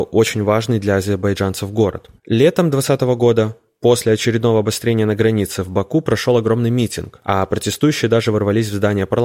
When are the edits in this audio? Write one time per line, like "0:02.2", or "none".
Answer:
0:02.2